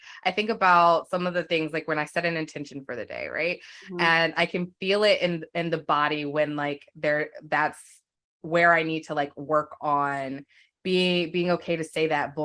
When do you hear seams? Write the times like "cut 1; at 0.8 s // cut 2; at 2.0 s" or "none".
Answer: none